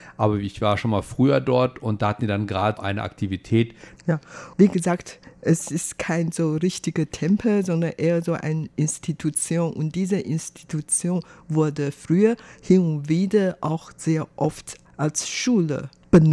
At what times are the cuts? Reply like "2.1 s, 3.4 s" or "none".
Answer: 2.8 s, 4.0 s